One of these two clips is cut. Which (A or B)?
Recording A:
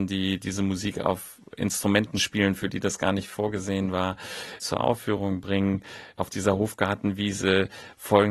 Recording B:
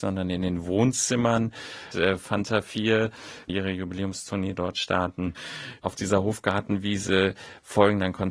B